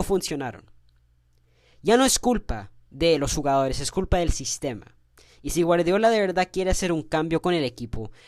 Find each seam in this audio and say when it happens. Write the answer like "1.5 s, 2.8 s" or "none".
none